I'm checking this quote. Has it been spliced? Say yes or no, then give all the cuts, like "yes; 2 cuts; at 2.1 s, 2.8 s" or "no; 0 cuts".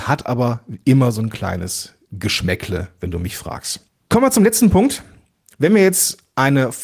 no; 0 cuts